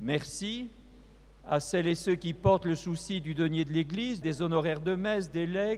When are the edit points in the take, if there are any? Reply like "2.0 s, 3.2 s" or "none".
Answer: 4.2 s

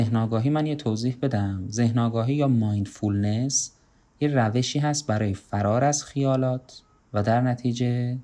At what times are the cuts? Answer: none

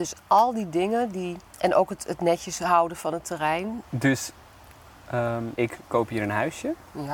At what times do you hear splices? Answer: 1.5 s, 3.8 s, 5.6 s

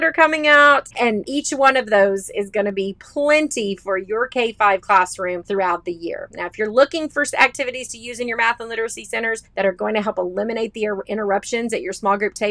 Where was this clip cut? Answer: 0.9 s

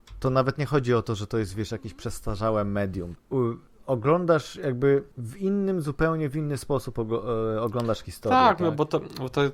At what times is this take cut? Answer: 3.2 s, 5.1 s

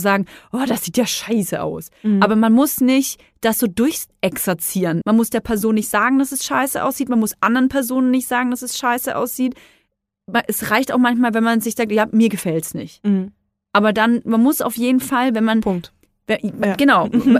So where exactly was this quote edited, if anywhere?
5.0 s

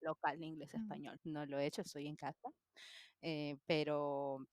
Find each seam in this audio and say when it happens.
1.2 s

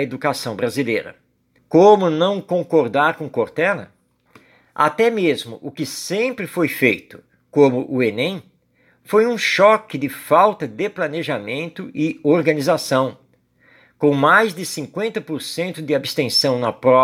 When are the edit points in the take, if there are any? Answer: 1.6 s

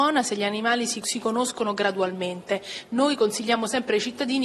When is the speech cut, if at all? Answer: 1.0 s

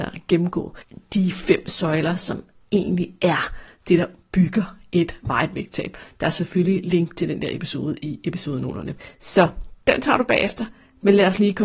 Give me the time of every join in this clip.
none

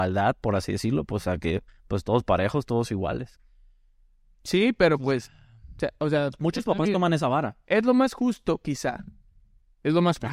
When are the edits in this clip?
none

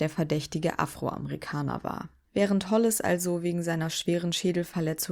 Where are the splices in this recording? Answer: 2.2 s

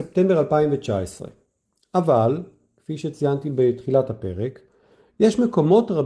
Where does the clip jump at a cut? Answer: none

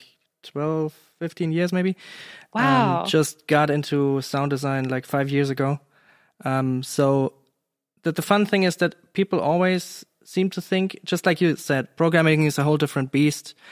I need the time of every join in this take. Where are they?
none

